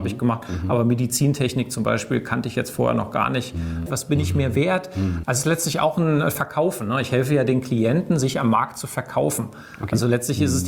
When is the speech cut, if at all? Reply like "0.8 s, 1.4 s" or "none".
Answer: 3.9 s, 5.2 s